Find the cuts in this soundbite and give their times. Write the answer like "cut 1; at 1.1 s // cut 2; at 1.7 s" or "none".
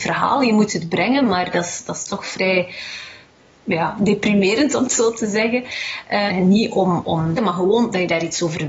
cut 1; at 6.3 s // cut 2; at 7.4 s